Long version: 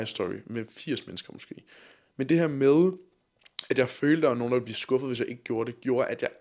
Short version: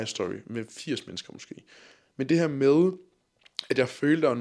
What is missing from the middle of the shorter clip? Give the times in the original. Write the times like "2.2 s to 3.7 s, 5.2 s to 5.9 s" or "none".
none

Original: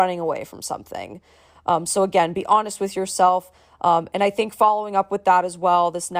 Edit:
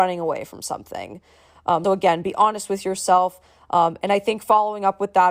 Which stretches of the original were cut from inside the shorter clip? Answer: 1.8 s to 2.0 s

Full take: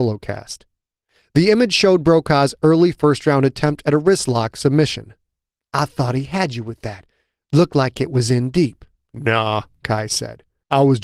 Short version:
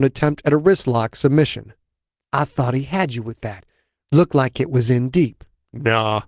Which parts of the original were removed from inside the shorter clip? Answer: none

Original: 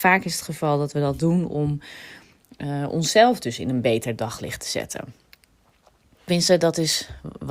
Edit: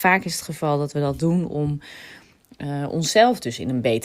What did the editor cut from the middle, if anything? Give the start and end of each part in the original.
none

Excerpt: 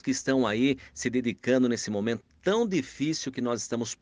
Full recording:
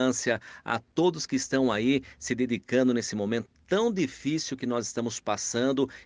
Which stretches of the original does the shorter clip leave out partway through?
none

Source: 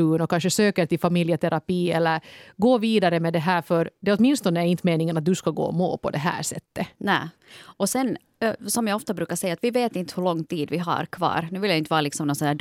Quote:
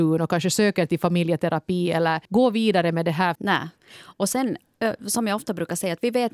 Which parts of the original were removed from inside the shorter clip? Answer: 2.2 s to 2.5 s, 3.6 s to 7.0 s

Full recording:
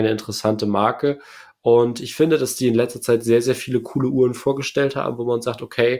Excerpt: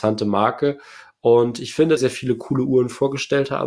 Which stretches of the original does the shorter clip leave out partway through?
2.4 s to 3.4 s

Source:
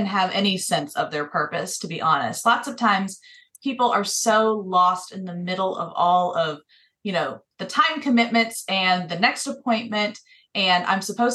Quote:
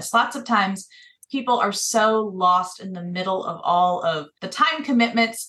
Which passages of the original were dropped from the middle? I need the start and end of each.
6.7 s to 7.6 s

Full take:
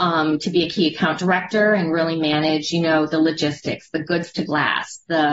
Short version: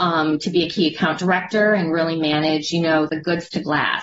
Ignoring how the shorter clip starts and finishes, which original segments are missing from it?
3.1 s to 3.9 s

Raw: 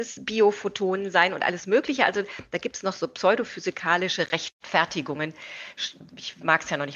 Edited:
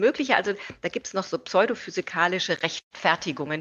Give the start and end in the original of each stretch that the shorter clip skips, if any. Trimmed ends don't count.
none

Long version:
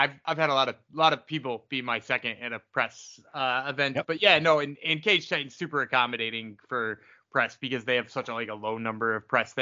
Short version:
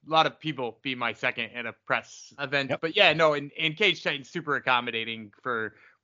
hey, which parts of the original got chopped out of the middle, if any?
3.2 s to 3.6 s

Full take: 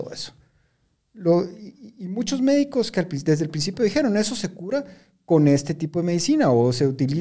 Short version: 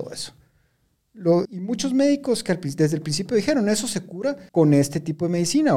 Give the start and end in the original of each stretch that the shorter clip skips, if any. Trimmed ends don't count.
1.5 s to 1.9 s, 5.0 s to 5.2 s

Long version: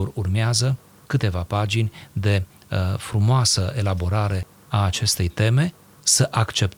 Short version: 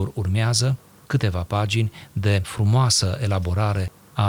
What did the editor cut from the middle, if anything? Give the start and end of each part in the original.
2.4 s to 3.0 s

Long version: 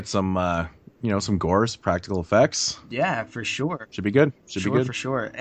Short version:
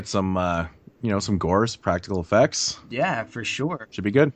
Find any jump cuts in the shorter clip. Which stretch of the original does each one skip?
none

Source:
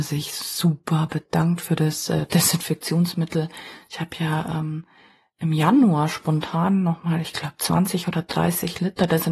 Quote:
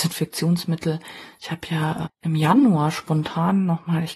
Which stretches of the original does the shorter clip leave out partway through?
4.5 s to 5.2 s

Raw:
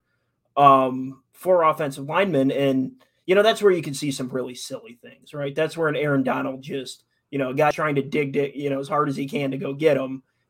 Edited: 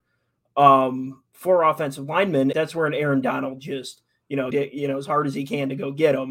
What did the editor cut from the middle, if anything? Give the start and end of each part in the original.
2.5 s to 5.5 s, 7.5 s to 8.3 s

